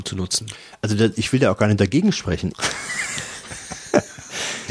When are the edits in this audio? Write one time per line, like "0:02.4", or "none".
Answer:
0:02.5